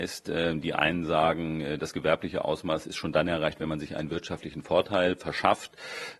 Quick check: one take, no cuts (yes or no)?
yes